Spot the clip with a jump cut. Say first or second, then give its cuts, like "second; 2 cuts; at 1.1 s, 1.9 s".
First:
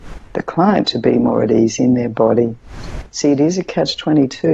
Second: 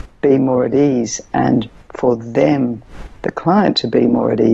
first; 1 cut; at 3.1 s